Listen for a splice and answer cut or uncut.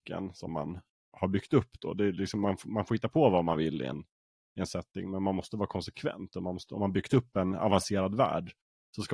uncut